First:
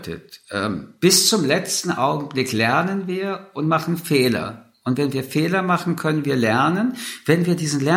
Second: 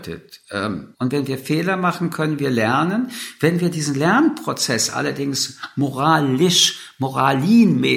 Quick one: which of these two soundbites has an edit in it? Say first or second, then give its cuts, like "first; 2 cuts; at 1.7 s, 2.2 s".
second; 1 cut; at 0.9 s